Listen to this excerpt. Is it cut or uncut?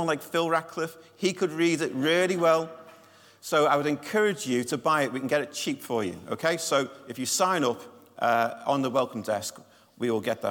uncut